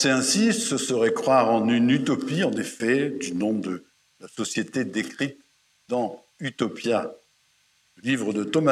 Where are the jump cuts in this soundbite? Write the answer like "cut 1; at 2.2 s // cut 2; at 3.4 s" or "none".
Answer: none